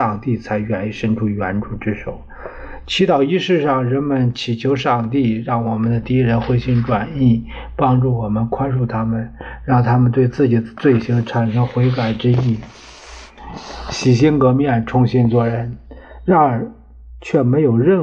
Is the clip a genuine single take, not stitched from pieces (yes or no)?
yes